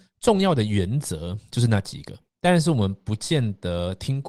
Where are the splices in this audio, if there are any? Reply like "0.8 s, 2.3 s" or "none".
2.3 s